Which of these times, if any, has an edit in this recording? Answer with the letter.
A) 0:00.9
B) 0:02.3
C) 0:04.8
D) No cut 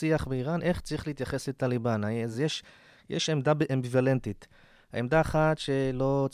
D